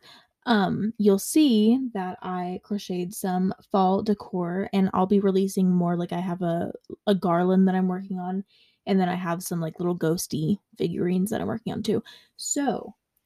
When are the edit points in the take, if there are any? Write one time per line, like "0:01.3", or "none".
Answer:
none